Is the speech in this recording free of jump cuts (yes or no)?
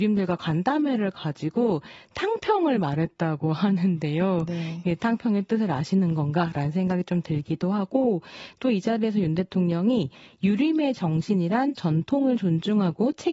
yes